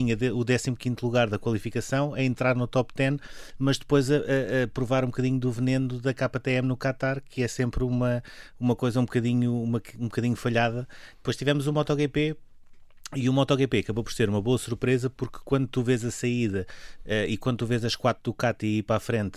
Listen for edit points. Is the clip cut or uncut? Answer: cut